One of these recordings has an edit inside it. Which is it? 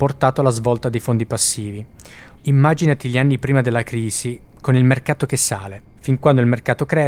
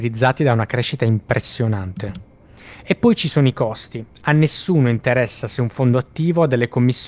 first; 1 cut; at 2.4 s

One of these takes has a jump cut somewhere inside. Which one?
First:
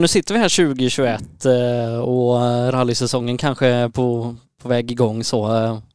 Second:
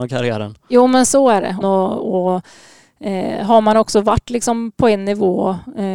second; 1 cut; at 1.6 s

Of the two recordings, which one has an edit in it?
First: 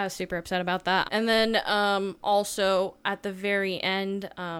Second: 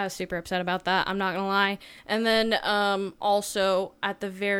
first; 1 cut; at 1.0 s

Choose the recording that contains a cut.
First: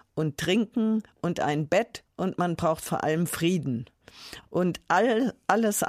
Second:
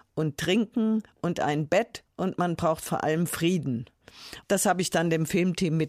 second; 1 cut; at 4.4 s

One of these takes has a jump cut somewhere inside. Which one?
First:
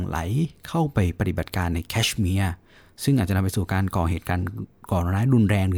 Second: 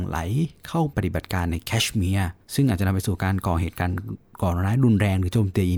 second; 2 cuts; at 0.9 s, 2.4 s

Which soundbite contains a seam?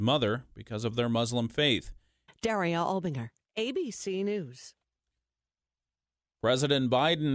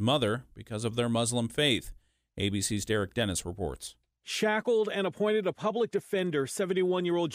first; 1 cut; at 2.3 s

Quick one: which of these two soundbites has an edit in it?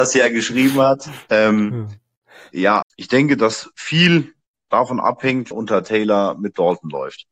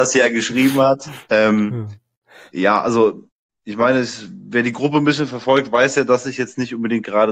first; 2 cuts; at 2.8 s, 5.5 s

